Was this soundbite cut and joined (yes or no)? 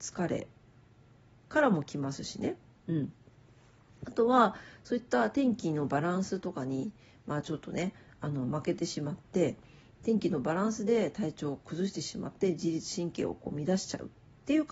no